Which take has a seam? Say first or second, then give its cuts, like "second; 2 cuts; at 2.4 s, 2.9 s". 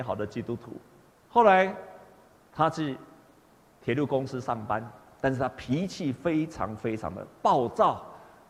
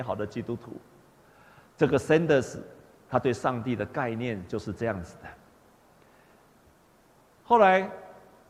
first; 1 cut; at 1.1 s